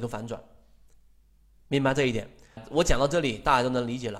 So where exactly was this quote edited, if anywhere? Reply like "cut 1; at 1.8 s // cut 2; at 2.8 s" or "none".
cut 1; at 2.6 s